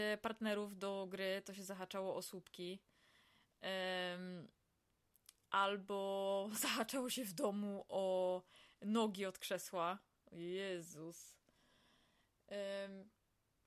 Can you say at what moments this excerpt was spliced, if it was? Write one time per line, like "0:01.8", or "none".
none